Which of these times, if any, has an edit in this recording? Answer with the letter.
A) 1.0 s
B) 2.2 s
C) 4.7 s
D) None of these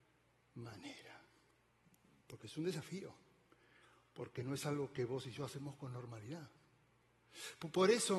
B